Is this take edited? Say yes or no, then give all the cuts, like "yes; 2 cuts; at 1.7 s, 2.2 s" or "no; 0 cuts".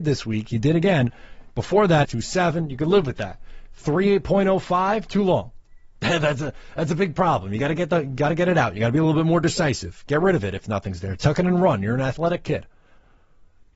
yes; 1 cut; at 2.0 s